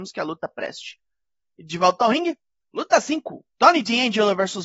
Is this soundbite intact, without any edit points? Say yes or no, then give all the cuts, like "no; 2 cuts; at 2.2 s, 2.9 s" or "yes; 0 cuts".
yes; 0 cuts